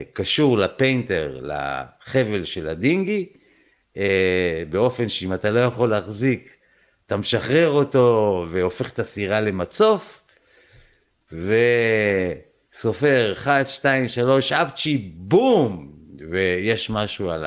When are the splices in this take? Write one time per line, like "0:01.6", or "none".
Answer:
none